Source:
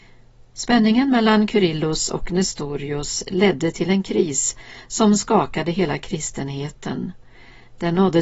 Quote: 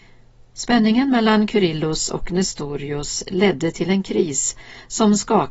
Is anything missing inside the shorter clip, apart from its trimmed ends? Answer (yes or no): no